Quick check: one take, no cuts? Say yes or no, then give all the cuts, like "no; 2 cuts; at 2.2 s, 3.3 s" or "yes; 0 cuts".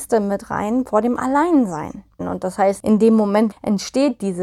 no; 2 cuts; at 2.2 s, 3.5 s